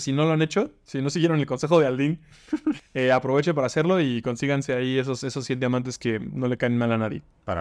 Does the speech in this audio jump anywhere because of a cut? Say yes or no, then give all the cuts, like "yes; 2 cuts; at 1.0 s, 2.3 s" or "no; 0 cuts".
yes; 1 cut; at 2.8 s